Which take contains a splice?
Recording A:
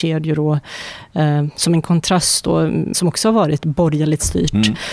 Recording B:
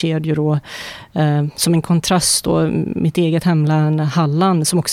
A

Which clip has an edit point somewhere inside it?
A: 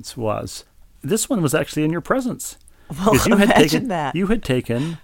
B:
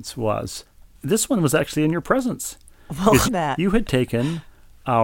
B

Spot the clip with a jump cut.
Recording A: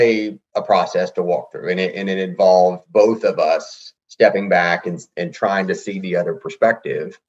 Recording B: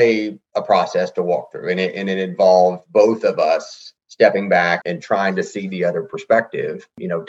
B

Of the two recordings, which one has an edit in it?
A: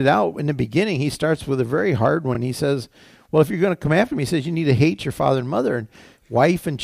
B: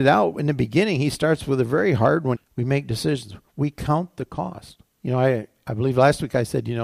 B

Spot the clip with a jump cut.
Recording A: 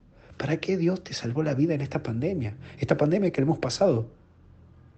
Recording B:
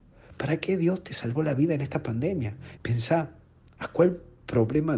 B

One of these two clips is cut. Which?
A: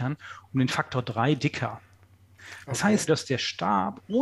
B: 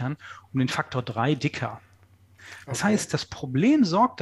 A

